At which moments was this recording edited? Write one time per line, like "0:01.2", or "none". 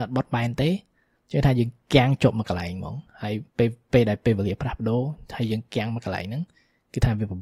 0:03.5